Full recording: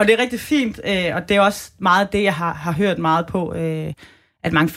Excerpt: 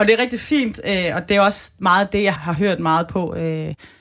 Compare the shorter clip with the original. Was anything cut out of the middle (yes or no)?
yes